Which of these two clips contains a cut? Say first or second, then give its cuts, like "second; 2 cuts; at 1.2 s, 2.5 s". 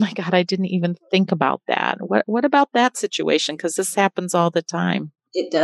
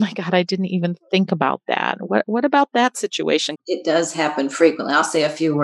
second; 1 cut; at 3.6 s